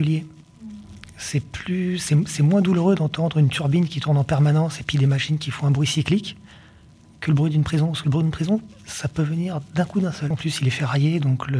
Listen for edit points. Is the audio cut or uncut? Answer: cut